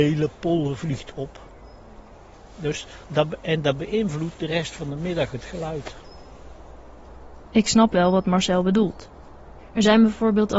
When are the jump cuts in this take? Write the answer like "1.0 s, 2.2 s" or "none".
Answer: none